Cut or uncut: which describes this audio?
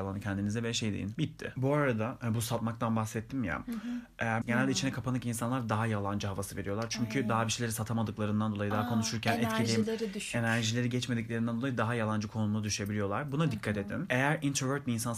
cut